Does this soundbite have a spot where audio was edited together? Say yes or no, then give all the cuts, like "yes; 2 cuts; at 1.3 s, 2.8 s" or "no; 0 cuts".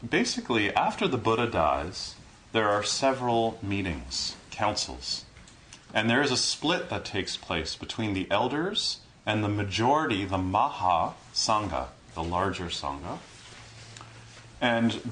yes; 1 cut; at 12.1 s